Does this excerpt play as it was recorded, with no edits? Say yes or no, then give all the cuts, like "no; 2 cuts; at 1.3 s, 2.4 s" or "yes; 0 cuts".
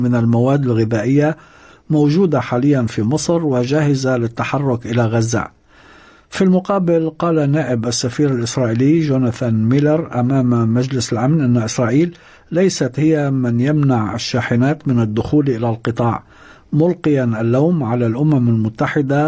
yes; 0 cuts